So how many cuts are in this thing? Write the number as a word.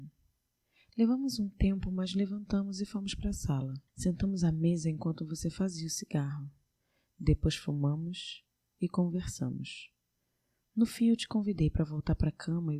one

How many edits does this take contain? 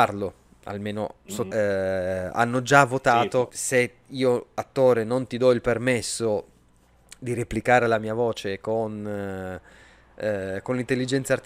two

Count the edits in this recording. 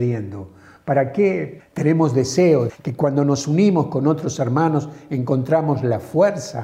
two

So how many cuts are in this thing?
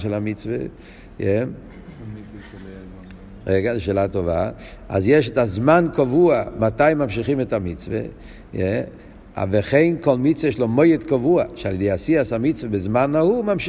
zero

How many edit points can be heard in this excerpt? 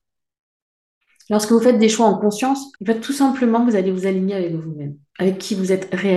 one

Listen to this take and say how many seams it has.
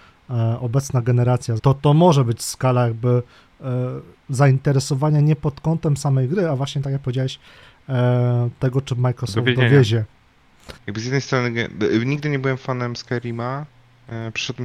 two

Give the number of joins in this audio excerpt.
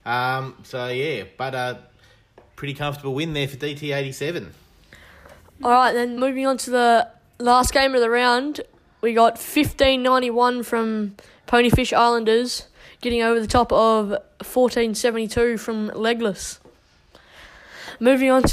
one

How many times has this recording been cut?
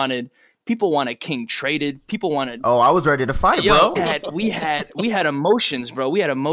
one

